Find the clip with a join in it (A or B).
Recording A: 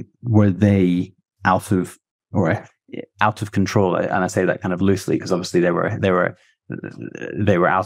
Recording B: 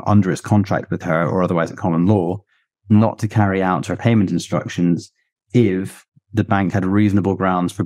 A